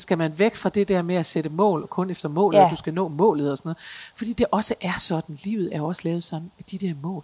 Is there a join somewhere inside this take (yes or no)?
yes